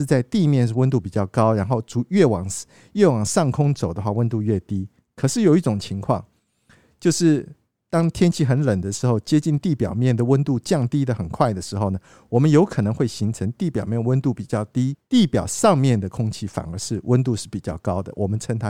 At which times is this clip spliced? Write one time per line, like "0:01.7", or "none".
none